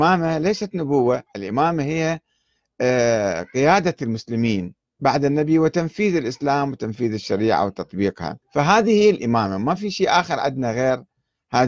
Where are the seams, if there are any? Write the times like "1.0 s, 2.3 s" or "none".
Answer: 1.3 s, 8.4 s